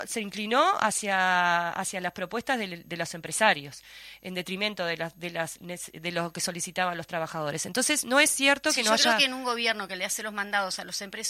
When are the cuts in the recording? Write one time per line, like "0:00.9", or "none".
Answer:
none